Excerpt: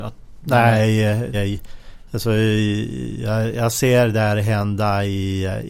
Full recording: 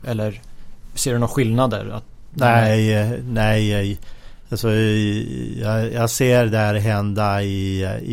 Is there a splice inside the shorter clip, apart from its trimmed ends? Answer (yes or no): yes